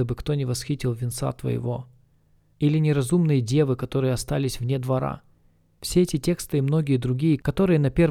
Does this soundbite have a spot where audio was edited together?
no; 0 cuts

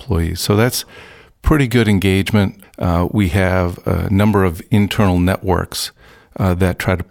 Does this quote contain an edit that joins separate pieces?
yes; 1 cut; at 2.6 s

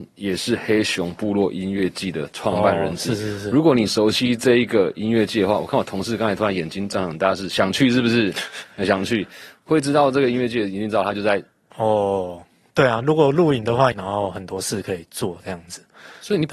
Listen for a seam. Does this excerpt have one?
yes; 2 cuts; at 11.7 s, 13.9 s

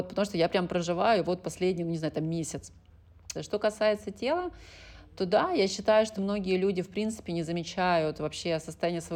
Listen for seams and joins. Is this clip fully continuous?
no; 2 cuts; at 3.3 s, 6.2 s

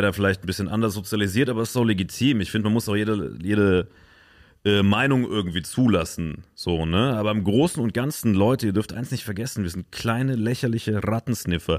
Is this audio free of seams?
yes; 0 cuts

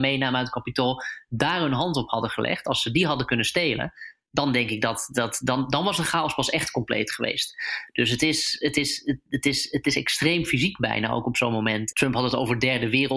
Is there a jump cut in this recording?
yes; 1 cut; at 11.9 s

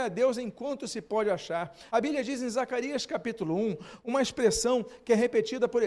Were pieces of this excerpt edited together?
no; 0 cuts

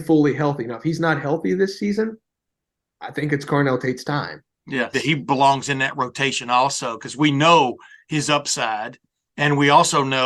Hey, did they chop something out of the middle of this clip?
yes; 1 cut; at 4.9 s

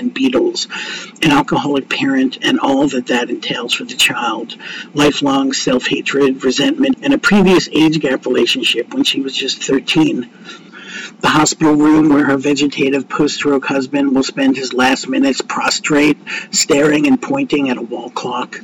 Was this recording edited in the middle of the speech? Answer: yes; 2 cuts; at 6.9 s, 10.7 s

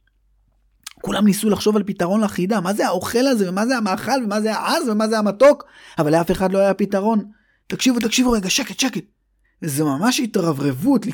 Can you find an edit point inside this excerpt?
yes; 2 cuts; at 7.6 s, 9.4 s

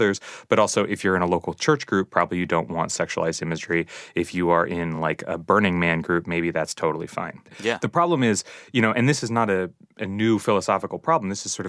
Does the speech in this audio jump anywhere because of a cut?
no; 0 cuts

